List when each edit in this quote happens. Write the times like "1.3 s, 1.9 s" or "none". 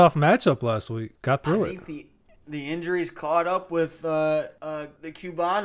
none